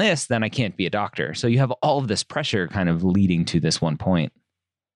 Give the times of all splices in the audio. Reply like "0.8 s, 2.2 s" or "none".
none

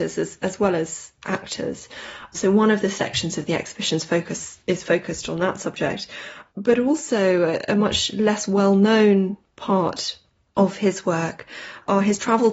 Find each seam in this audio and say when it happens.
none

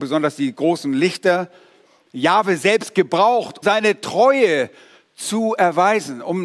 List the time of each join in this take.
3.6 s

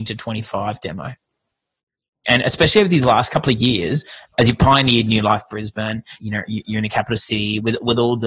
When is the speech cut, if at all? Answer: 2.2 s, 6.2 s

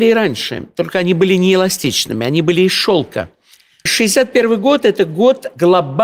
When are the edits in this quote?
3.9 s

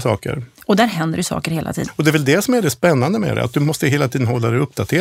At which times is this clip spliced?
1.9 s

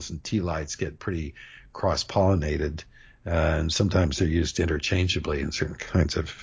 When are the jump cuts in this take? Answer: none

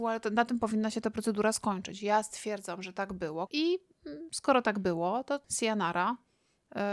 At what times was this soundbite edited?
3.5 s, 5.4 s

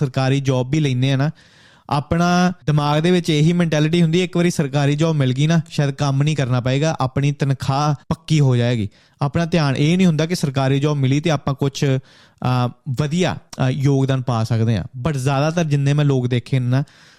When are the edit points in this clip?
2.6 s

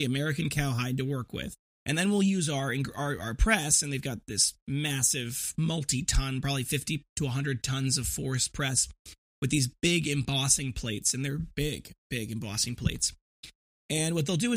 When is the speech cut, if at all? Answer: 1.7 s

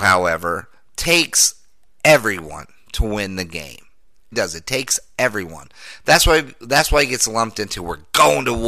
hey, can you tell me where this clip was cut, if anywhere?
4.3 s

